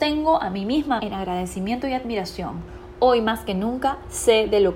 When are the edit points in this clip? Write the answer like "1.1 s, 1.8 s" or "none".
1.0 s